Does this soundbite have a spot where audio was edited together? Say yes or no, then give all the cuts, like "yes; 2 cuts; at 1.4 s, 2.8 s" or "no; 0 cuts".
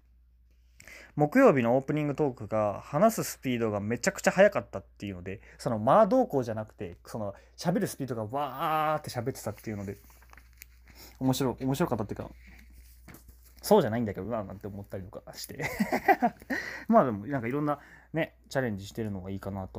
no; 0 cuts